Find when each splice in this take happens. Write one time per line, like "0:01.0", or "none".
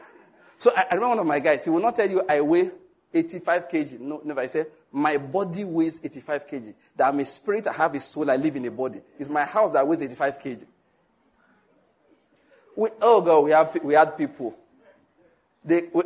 none